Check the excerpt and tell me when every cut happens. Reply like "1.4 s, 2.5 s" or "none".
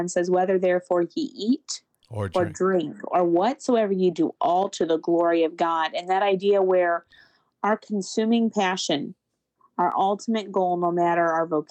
4.1 s

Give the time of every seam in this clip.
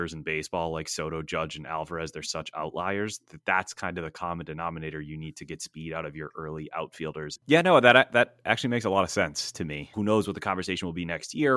7.4 s, 9.9 s

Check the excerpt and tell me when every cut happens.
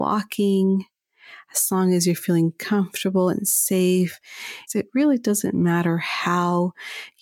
4.7 s

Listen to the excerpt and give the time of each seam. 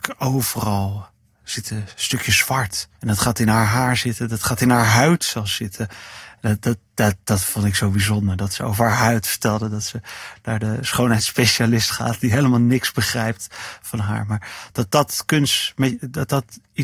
3.0 s

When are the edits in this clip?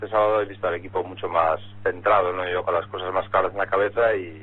none

